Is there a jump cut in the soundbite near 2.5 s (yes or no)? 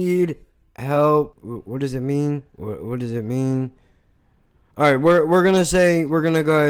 yes